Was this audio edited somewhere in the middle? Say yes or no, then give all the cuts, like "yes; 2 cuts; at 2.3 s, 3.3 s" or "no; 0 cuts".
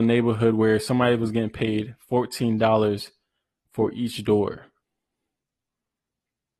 no; 0 cuts